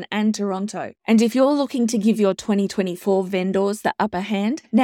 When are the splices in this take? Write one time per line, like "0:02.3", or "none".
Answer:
0:01.0